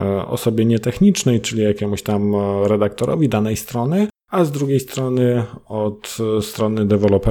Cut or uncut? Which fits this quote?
uncut